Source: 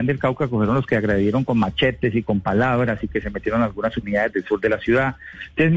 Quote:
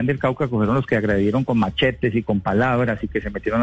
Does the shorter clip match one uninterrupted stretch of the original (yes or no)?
yes